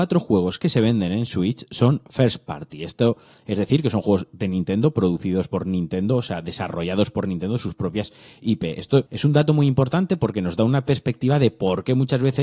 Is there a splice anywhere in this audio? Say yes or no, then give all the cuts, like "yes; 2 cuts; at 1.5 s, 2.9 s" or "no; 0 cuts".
no; 0 cuts